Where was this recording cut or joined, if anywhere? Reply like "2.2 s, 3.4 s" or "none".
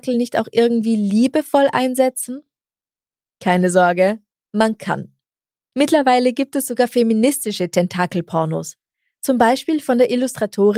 none

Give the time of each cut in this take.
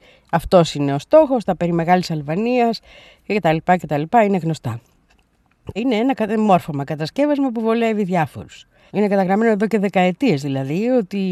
5.8 s, 8.9 s

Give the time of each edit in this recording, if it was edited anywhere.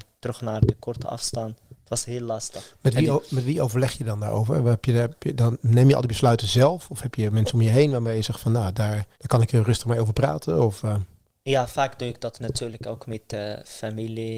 9.1 s

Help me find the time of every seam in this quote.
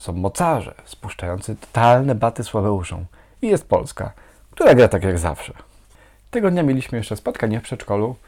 none

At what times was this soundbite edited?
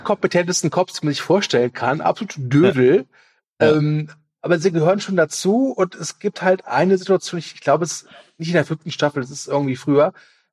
none

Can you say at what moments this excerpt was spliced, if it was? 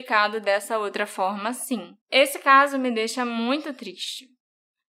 2.0 s

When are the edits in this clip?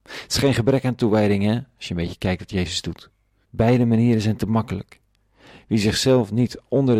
3.4 s

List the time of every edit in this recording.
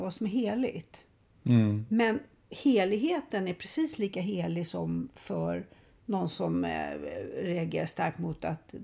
none

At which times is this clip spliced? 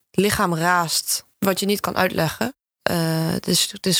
1.3 s

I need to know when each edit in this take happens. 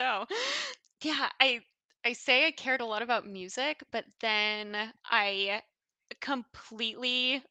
5.0 s

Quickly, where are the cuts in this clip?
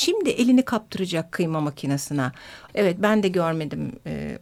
2.7 s

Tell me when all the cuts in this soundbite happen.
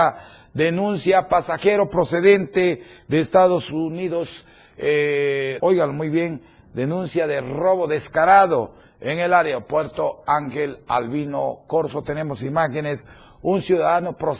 5.6 s

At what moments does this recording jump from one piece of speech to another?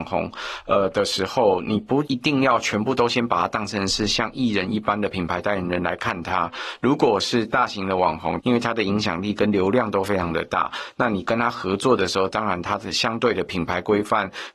8.4 s

